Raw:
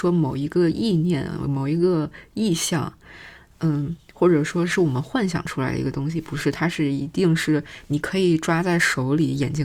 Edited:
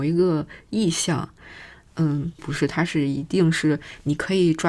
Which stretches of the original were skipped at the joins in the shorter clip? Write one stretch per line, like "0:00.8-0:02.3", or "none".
0:04.0-0:06.2